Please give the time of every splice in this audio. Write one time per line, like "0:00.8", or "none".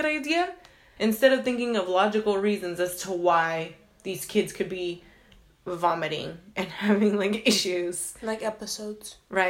0:01.0